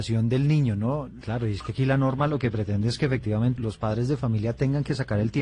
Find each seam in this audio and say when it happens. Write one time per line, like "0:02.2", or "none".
0:01.2
0:03.6